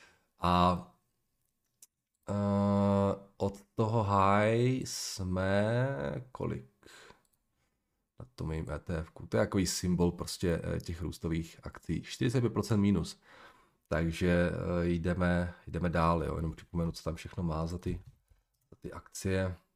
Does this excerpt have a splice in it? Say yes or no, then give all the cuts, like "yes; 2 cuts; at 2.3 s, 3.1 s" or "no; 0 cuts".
no; 0 cuts